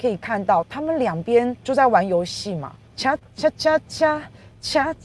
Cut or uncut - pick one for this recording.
cut